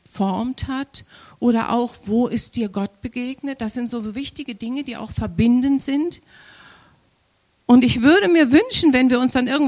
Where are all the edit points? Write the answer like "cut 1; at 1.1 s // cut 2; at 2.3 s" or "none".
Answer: none